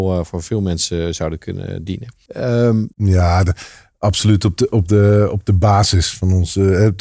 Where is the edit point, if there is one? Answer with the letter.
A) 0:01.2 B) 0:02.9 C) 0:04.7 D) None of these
B